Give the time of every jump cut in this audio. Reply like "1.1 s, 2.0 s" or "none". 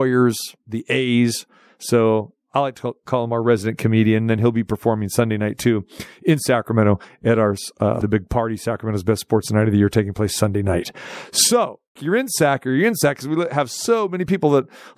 8.0 s, 12.0 s

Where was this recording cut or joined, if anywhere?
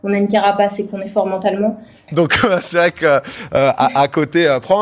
2.1 s

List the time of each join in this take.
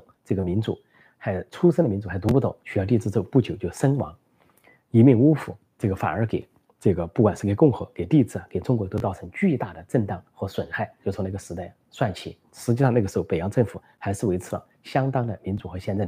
2.6 s, 11.0 s

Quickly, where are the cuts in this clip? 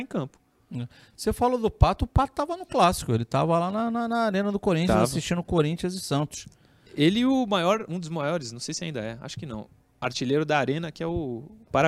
none

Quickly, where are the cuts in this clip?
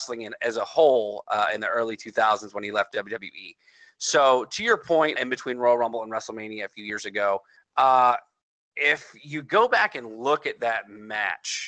5.2 s, 7.6 s

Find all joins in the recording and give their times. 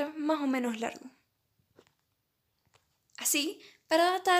none

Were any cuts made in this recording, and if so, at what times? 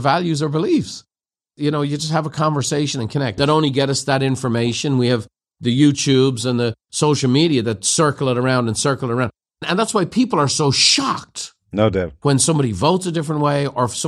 3.4 s

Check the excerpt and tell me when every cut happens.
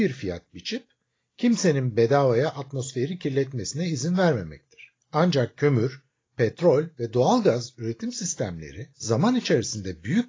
5.0 s, 8.9 s

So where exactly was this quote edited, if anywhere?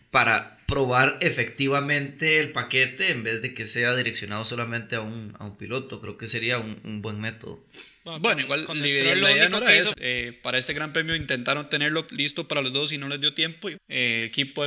9.9 s, 13.8 s

